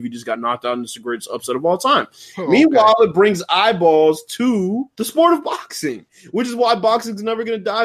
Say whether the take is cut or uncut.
cut